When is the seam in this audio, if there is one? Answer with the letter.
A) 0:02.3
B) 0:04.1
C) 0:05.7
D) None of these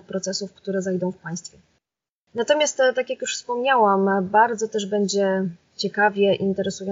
A